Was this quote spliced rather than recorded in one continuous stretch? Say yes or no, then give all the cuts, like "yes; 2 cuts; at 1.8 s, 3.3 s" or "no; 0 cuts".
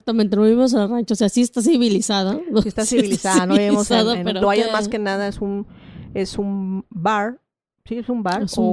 yes; 1 cut; at 4.4 s